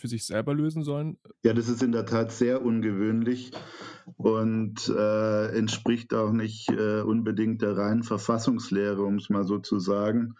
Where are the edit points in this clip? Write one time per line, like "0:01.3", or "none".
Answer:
0:01.3